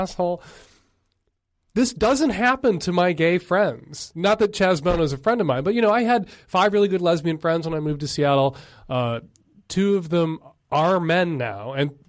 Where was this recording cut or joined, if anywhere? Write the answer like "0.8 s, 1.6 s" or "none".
none